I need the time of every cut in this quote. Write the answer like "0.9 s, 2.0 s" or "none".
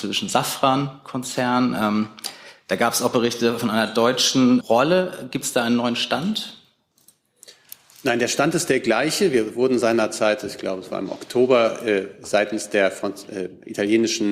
4.6 s

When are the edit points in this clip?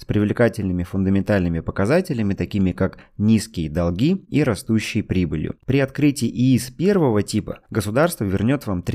5.6 s

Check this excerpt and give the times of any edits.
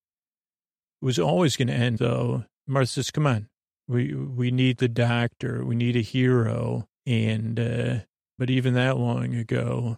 2.5 s, 7.0 s, 8.4 s

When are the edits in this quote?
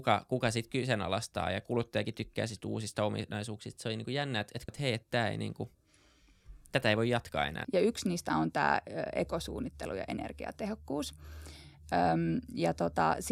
4.7 s, 7.6 s

